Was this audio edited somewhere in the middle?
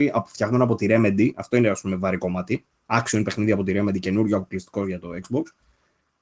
no; 0 cuts

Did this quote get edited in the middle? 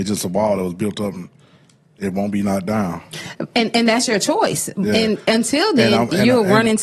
no; 0 cuts

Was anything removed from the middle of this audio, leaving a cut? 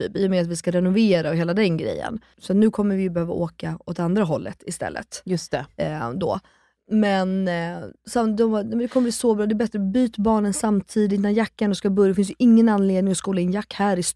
yes; 1 cut; at 2.3 s

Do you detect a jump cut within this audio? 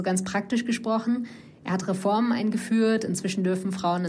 no; 0 cuts

